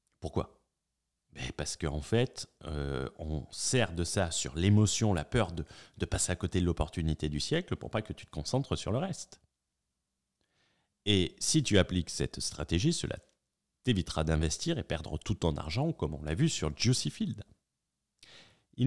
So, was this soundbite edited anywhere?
no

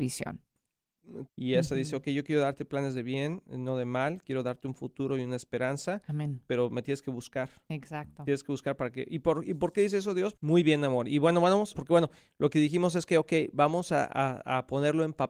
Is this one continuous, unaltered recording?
no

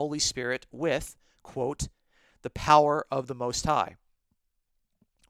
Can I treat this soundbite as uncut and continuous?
yes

